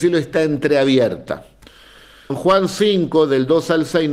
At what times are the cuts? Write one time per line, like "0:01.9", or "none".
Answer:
0:02.3